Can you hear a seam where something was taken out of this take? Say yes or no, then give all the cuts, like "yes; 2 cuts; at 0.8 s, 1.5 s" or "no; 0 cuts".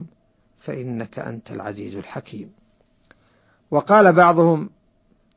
no; 0 cuts